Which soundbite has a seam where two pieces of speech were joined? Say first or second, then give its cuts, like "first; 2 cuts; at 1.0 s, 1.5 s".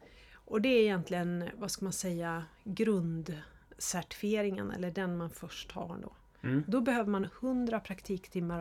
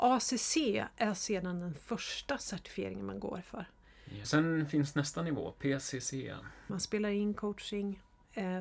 second; 2 cuts; at 4.2 s, 6.7 s